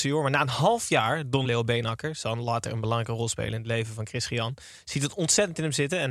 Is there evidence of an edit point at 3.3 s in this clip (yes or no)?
no